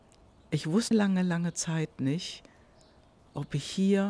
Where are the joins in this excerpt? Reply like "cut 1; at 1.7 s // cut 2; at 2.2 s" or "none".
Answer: cut 1; at 0.9 s